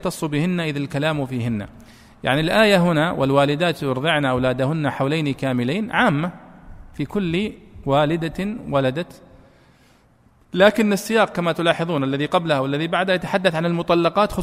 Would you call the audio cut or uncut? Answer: uncut